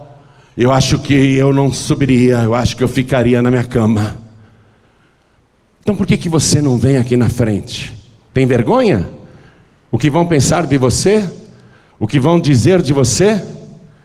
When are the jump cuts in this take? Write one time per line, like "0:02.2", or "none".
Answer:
0:08.3